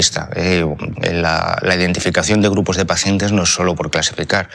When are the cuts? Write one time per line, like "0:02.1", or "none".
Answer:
0:01.0